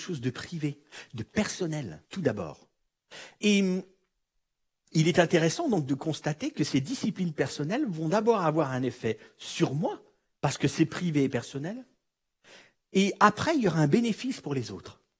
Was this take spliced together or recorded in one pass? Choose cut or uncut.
cut